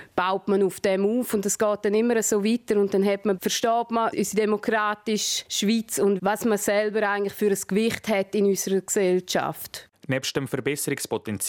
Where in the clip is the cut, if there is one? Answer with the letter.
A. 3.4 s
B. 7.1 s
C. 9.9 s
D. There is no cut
A